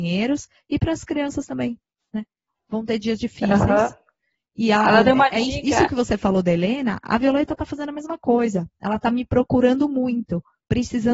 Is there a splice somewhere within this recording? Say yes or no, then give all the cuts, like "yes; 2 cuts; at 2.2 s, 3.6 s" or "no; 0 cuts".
no; 0 cuts